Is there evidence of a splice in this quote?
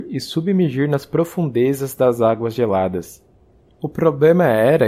yes; 1 cut; at 3.7 s

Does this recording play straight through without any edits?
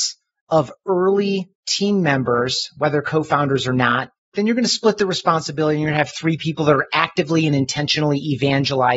no; 1 cut; at 4.3 s

